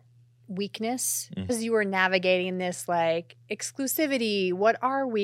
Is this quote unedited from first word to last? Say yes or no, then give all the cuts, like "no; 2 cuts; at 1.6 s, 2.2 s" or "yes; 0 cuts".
no; 1 cut; at 1.5 s